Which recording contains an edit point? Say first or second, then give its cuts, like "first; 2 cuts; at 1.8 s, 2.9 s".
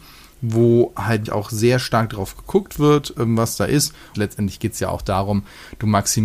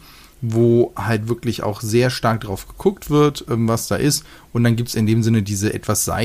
first; 2 cuts; at 1.3 s, 4.1 s